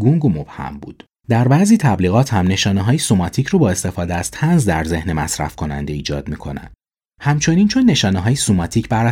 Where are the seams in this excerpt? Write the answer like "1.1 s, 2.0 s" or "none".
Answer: 1.2 s